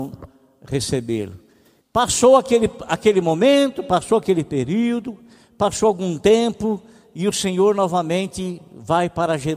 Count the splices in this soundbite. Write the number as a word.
one